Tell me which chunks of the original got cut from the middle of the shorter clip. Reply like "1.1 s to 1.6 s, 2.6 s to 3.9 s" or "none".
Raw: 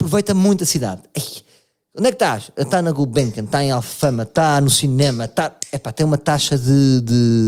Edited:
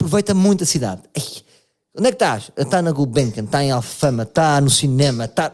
none